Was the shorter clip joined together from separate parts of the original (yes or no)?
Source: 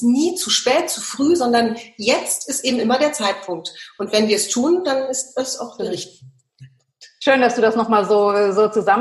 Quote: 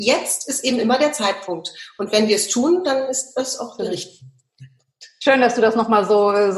no